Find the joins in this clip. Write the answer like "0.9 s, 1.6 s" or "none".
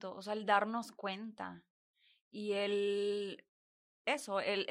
none